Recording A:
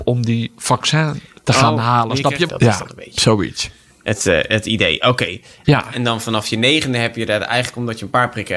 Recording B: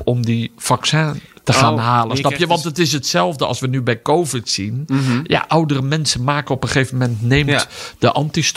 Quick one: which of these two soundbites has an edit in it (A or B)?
A